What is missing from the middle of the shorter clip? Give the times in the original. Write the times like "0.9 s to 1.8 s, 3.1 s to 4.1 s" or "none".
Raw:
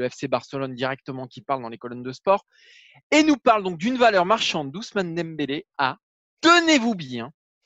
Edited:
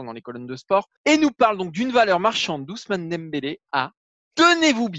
2.5 s to 3.0 s